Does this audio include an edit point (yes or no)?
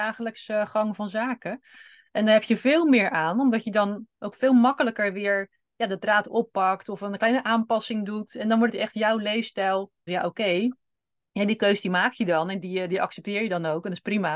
yes